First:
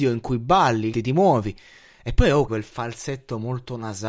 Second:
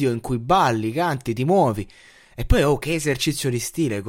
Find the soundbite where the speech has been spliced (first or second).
first